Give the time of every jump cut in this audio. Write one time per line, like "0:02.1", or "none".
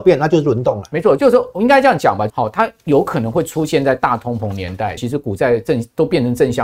0:01.2
0:02.3
0:05.0